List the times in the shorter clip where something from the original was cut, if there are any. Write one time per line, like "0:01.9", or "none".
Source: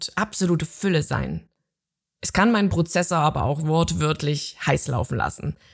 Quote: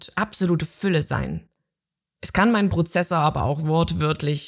none